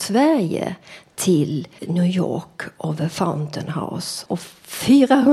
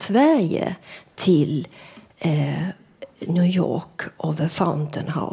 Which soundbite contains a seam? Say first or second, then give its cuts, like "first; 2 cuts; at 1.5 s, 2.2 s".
first; 2 cuts; at 1.8 s, 4.3 s